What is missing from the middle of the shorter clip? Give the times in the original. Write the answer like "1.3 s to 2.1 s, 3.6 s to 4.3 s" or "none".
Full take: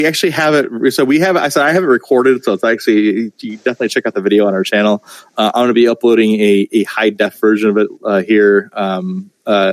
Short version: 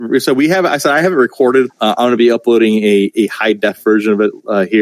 2.4 s to 5.3 s